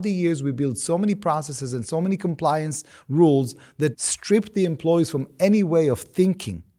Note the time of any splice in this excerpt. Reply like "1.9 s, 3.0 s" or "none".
3.9 s